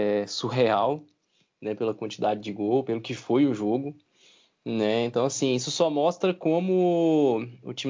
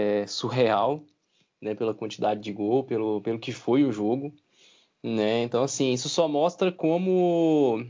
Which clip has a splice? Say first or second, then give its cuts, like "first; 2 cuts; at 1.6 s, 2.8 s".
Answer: first; 1 cut; at 2.8 s